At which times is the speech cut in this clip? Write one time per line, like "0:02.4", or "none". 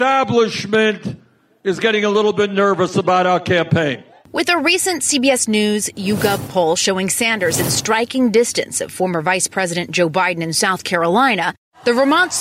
none